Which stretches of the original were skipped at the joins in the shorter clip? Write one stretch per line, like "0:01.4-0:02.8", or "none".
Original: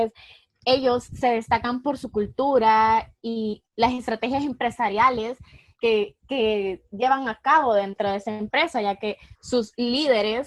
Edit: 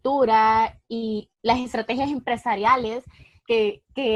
none

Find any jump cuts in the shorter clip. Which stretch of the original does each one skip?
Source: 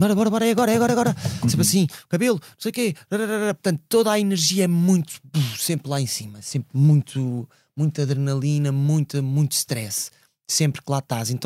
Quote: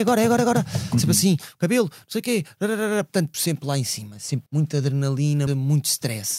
0:03.8-0:05.6
0:06.7-0:07.7
0:08.7-0:09.1

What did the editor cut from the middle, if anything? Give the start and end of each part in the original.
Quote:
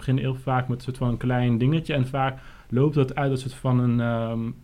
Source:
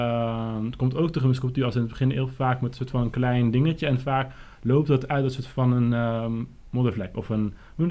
none

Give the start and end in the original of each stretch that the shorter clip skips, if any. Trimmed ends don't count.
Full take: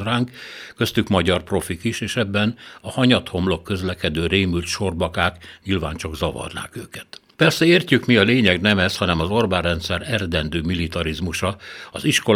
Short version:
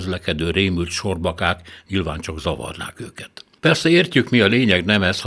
none

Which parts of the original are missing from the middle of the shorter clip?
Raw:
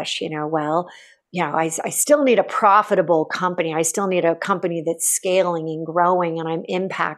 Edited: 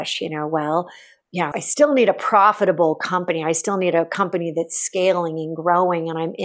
0:01.5-0:01.8

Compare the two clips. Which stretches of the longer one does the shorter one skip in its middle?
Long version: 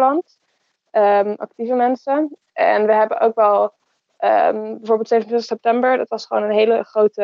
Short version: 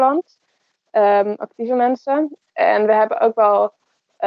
none

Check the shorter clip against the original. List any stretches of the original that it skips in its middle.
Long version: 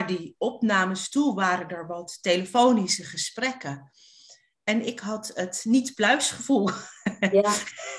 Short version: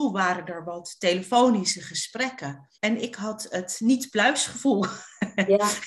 0:04.0-0:04.6

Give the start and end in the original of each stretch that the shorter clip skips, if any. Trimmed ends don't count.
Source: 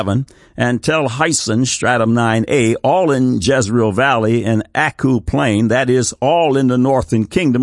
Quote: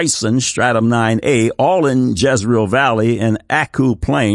none

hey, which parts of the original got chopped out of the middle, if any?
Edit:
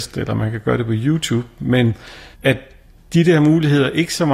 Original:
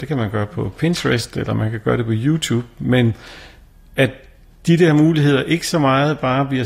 0:03.5-0:03.9

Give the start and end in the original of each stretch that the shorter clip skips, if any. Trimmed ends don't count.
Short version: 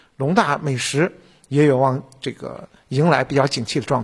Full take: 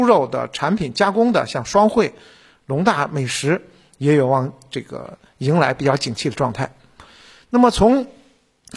none

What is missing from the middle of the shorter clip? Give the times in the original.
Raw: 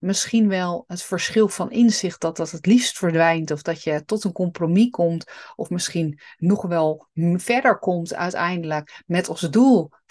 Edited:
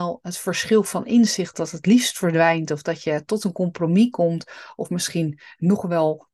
0:02.2-0:02.3

